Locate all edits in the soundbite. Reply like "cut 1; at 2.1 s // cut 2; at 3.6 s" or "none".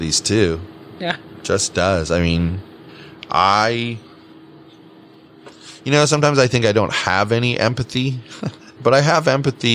cut 1; at 8.8 s